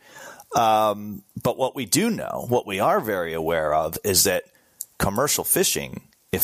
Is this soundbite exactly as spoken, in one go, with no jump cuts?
yes; 0 cuts

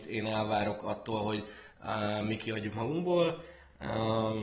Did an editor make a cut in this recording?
no; 0 cuts

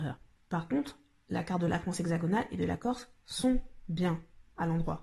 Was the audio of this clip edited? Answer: no; 0 cuts

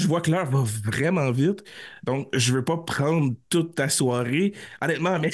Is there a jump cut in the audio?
no; 0 cuts

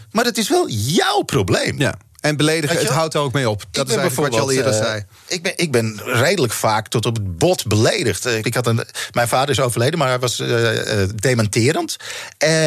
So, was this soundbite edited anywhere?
yes; 1 cut; at 8.4 s

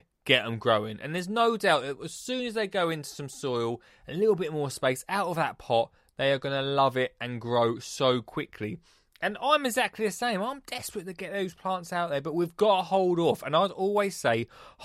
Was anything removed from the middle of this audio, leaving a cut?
no; 0 cuts

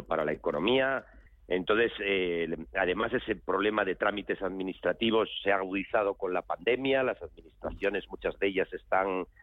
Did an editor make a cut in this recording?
yes; 1 cut; at 1.3 s

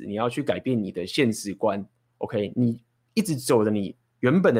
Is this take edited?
no; 0 cuts

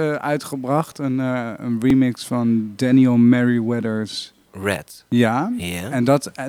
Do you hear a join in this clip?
no; 0 cuts

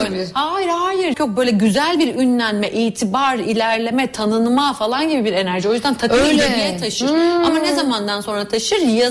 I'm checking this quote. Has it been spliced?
yes; 1 cut; at 1.1 s

